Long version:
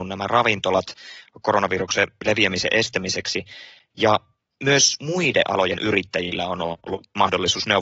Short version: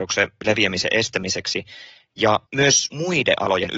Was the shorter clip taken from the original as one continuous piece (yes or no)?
no